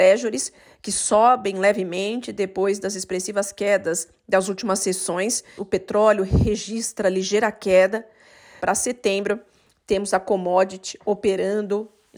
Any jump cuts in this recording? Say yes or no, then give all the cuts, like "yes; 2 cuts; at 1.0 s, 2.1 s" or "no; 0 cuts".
yes; 2 cuts; at 5.6 s, 8.6 s